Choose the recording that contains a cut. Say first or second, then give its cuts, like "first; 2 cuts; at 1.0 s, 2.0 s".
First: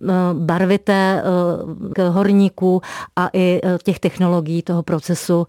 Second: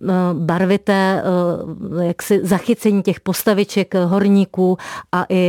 first; 1 cut; at 1.9 s